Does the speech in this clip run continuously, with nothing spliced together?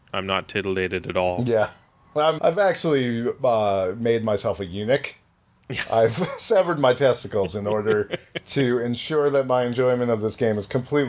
no; 1 cut; at 2.4 s

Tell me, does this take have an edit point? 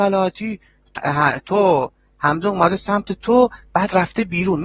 yes; 1 cut; at 1.0 s

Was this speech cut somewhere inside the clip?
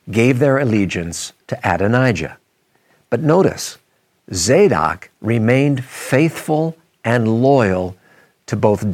yes; 1 cut; at 1.4 s

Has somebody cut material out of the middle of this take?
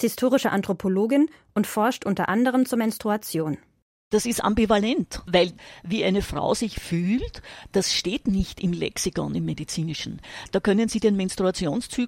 no; 0 cuts

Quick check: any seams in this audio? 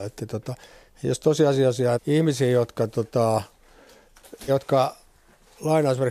yes; 2 cuts; at 2.0 s, 4.5 s

